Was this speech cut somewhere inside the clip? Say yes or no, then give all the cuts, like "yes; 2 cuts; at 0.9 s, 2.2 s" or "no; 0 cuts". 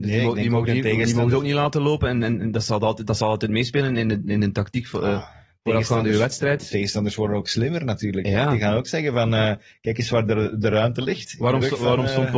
no; 0 cuts